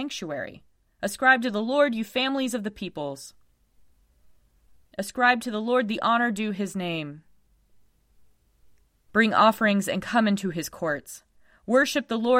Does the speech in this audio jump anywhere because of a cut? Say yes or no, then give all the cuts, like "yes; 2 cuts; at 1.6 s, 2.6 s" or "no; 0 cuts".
yes; 1 cut; at 4.9 s